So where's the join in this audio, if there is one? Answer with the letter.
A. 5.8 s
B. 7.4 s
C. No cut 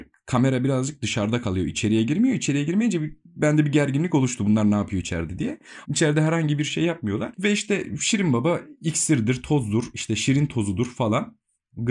A